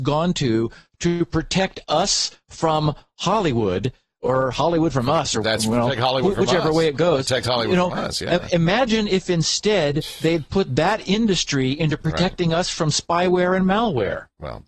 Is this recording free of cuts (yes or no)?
yes